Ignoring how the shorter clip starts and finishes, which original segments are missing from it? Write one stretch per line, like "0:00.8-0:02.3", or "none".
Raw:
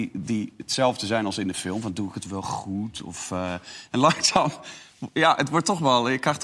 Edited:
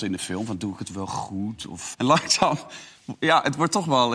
0:03.3-0:03.9

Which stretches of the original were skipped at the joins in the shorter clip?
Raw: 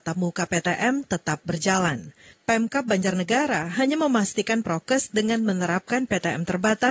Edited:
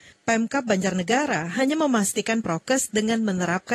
none

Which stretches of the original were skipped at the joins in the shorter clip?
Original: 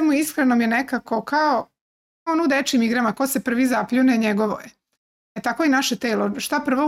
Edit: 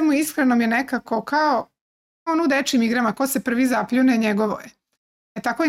none

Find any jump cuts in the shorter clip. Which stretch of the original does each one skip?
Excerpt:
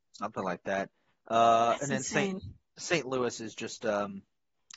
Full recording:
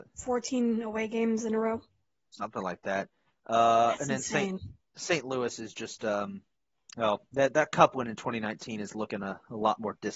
none

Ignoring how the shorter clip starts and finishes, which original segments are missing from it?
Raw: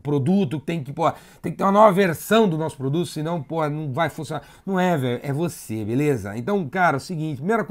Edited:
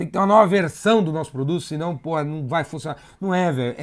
none

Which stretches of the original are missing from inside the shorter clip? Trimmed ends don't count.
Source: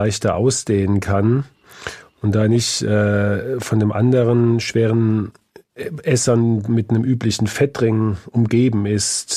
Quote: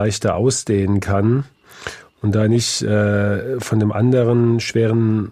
none

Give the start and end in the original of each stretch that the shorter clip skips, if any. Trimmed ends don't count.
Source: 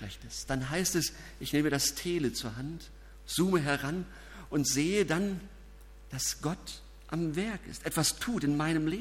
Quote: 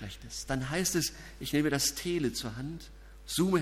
none

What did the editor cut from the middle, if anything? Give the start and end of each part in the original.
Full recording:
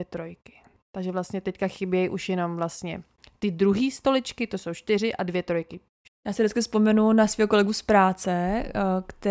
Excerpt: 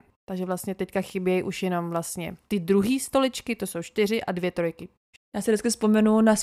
0:03.1-0:03.4

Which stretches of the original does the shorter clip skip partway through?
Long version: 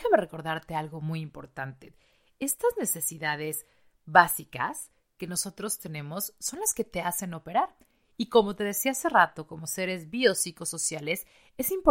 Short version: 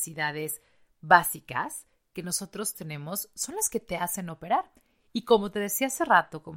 none

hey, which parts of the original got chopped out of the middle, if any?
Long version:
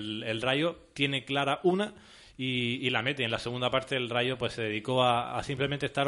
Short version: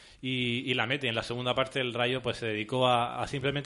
none

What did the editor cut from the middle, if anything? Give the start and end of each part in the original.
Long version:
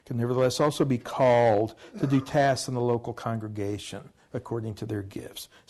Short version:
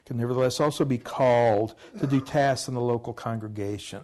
none

